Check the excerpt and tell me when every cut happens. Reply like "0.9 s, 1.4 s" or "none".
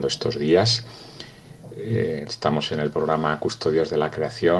2.3 s